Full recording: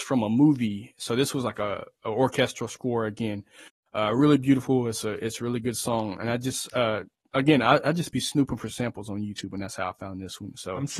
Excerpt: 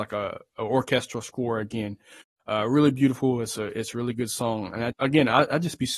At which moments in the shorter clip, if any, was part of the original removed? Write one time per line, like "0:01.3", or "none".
0:04.9